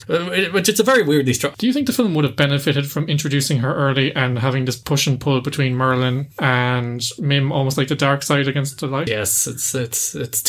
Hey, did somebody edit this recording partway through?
yes; 1 cut; at 9.1 s

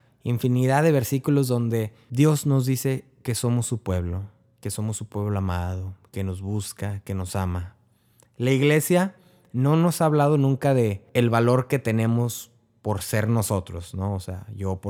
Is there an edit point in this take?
no; 0 cuts

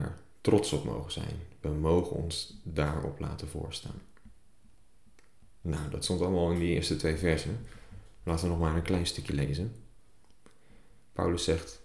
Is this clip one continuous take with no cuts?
yes; 0 cuts

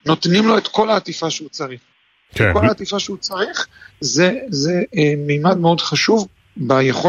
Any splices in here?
no; 0 cuts

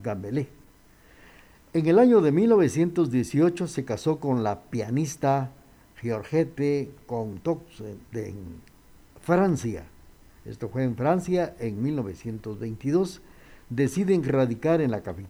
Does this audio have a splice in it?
no; 0 cuts

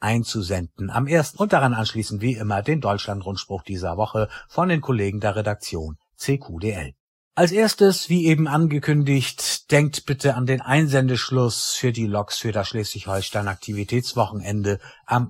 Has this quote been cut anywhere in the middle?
yes; 1 cut; at 1.3 s

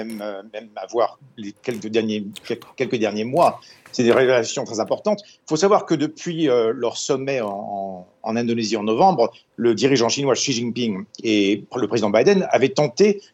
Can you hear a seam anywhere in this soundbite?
no; 0 cuts

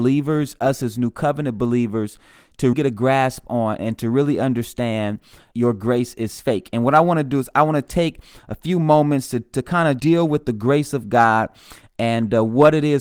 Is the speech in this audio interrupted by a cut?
yes; 3 cuts; at 2.7 s, 5.5 s, 10.0 s

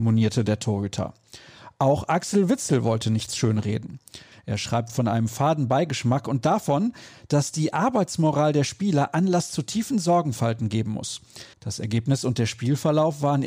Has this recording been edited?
yes; 2 cuts; at 4.3 s, 11.5 s

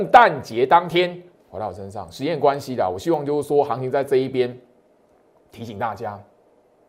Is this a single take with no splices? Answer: no; 1 cut; at 1.4 s

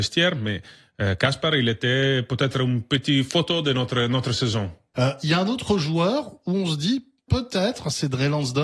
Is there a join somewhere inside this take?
yes; 2 cuts; at 4.9 s, 7.3 s

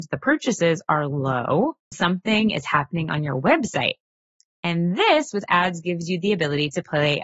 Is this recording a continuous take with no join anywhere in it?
no; 1 cut; at 1.9 s

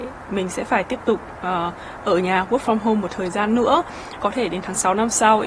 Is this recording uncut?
no; 1 cut; at 4.2 s

